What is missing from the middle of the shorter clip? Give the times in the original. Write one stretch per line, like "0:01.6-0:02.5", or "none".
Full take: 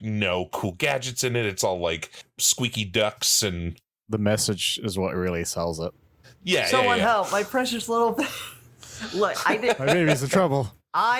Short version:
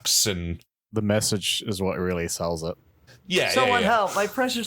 none